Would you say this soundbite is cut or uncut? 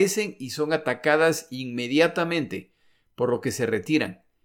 uncut